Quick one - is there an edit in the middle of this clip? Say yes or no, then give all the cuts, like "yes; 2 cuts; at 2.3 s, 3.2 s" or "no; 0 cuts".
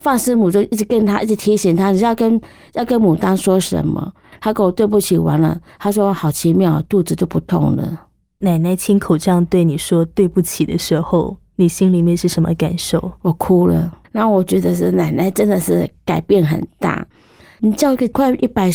yes; 2 cuts; at 4.3 s, 14.0 s